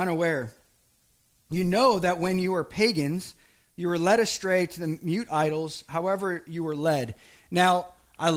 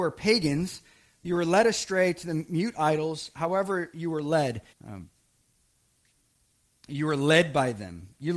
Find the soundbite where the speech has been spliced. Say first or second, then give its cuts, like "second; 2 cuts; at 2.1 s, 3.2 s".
second; 1 cut; at 4.7 s